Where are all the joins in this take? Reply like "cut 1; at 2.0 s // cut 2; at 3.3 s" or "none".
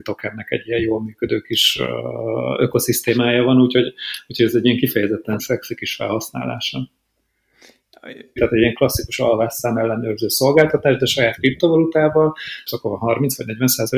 cut 1; at 5.4 s // cut 2; at 8.4 s // cut 3; at 12.7 s